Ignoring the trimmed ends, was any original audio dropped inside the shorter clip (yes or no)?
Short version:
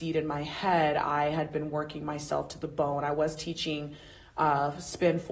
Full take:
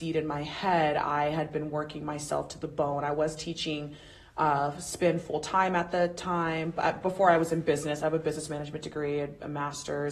no